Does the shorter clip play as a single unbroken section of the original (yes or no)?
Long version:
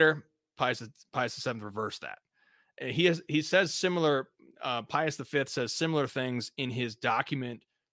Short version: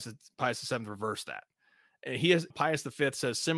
no